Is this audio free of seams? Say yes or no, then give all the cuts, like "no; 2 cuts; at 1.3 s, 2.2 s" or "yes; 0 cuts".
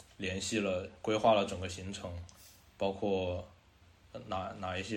yes; 0 cuts